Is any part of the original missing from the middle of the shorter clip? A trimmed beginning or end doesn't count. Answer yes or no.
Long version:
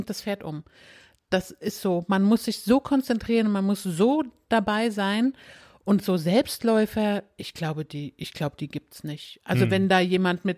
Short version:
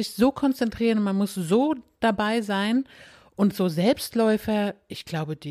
no